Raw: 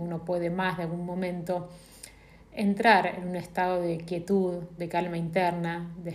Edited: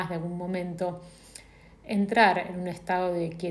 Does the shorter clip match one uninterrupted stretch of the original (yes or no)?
yes